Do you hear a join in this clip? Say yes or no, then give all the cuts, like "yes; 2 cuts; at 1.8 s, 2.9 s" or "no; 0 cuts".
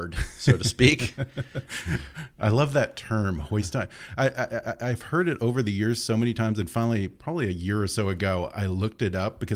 no; 0 cuts